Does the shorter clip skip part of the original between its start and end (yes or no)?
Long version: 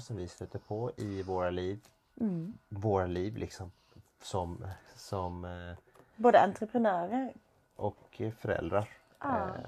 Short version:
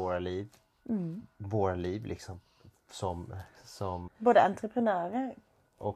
yes